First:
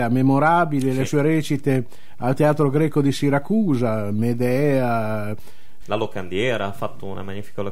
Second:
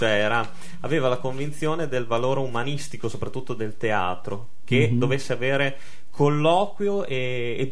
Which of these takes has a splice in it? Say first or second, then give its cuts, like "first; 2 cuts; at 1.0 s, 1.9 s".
first; 1 cut; at 5.8 s